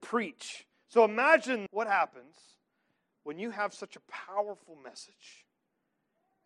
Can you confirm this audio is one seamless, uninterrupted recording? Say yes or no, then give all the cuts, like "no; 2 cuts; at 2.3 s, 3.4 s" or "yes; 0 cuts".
no; 1 cut; at 1.7 s